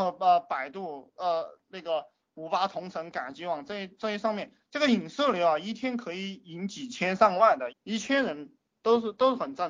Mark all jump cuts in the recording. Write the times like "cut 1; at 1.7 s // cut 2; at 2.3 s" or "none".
cut 1; at 7.7 s